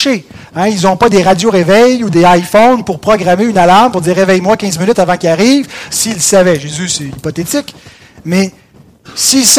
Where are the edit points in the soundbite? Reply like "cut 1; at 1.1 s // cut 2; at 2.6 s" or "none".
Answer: cut 1; at 5.9 s